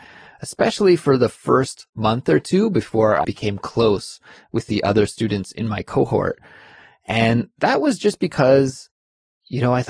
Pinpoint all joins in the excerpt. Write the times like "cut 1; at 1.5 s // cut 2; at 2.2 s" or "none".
cut 1; at 3.2 s